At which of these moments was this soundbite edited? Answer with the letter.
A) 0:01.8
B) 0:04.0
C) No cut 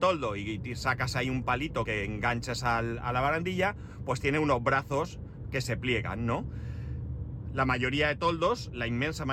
A